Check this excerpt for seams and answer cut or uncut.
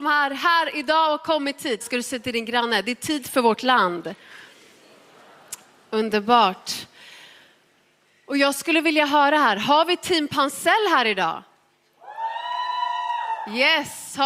cut